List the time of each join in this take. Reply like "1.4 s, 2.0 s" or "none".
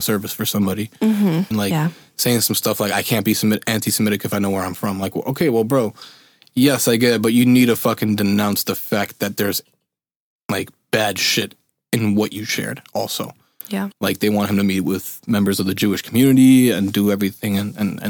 1.5 s, 13.9 s